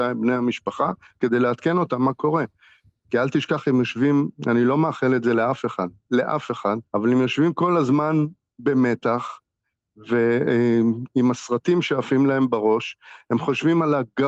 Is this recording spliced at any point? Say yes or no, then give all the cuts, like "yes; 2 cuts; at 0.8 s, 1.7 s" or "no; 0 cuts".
yes; 1 cut; at 6.9 s